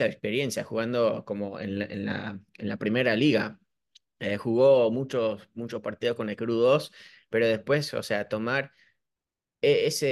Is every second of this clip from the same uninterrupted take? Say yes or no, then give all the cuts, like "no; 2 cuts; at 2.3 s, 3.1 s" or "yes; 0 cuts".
yes; 0 cuts